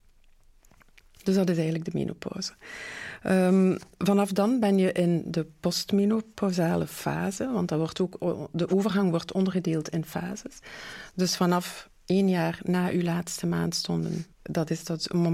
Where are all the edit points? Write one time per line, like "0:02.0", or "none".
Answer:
0:14.3